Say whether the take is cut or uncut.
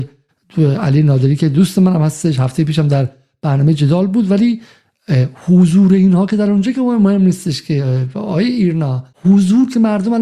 cut